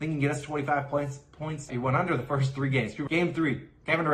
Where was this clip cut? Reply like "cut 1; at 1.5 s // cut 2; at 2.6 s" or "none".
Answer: cut 1; at 1.7 s // cut 2; at 3.1 s